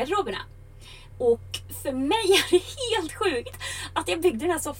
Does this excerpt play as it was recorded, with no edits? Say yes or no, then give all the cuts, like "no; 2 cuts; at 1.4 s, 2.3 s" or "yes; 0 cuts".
no; 1 cut; at 1.1 s